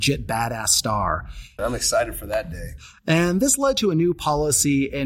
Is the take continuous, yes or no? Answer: no